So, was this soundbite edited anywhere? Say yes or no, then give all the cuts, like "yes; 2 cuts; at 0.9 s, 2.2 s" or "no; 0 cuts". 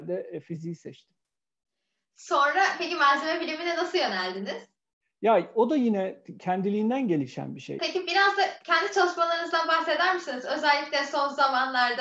yes; 1 cut; at 7.8 s